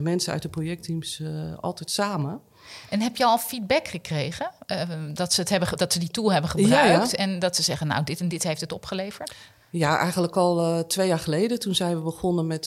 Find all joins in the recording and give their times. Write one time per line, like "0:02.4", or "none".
none